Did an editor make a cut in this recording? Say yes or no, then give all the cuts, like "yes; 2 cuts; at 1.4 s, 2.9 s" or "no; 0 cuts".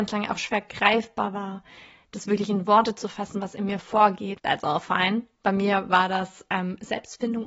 yes; 1 cut; at 4.4 s